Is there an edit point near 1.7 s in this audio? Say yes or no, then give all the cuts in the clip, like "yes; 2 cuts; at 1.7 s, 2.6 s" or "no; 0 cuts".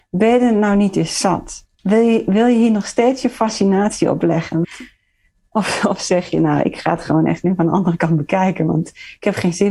yes; 2 cuts; at 1.7 s, 4.6 s